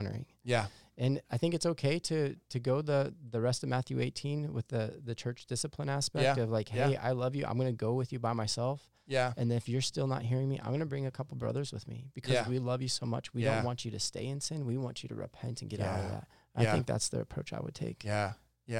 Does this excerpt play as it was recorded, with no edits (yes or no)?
yes